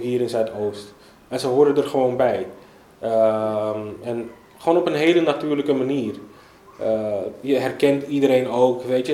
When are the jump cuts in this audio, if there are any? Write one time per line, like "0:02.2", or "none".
none